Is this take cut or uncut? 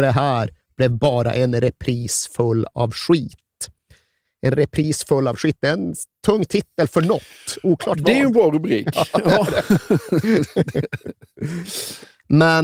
uncut